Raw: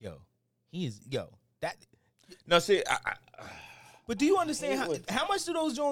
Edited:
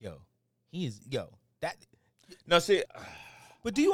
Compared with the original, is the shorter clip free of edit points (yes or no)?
no